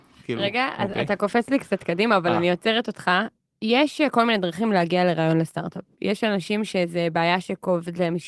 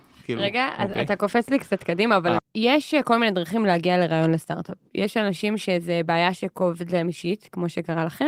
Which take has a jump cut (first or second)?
second